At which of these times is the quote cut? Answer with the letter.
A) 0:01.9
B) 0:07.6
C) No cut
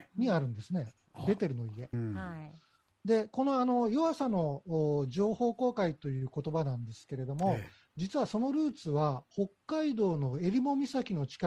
A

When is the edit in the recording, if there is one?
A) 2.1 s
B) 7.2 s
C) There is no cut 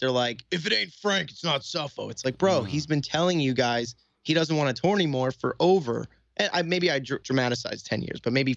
B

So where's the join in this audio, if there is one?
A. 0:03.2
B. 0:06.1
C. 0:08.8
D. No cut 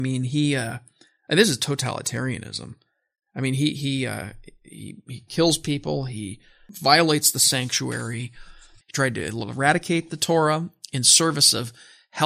C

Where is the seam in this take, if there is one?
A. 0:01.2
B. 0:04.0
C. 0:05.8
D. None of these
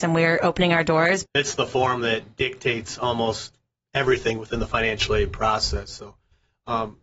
A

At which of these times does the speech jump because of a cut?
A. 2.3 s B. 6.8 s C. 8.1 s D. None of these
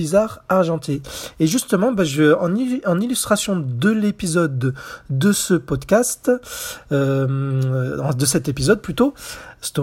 D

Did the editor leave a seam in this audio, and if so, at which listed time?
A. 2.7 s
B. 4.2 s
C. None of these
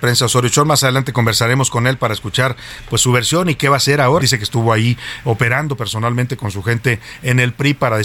B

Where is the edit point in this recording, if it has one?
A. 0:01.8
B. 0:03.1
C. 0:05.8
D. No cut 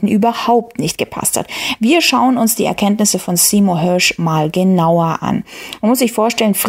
D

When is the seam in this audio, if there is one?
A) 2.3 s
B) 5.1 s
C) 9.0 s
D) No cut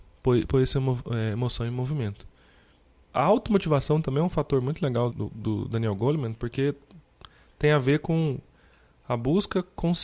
B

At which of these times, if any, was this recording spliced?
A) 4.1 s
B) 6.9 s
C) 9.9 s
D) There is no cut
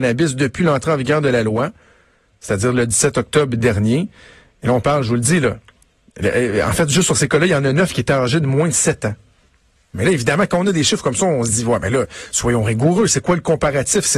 C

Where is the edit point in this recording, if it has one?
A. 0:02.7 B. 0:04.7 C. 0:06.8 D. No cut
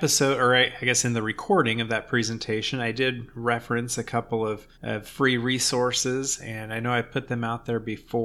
B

